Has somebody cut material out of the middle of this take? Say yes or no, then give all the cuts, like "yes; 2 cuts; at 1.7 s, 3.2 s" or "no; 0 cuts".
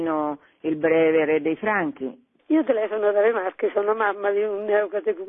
yes; 1 cut; at 2.4 s